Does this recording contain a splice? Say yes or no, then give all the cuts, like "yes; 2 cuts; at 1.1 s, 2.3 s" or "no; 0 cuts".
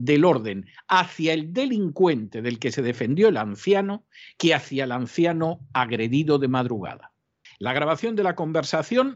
yes; 1 cut; at 7.5 s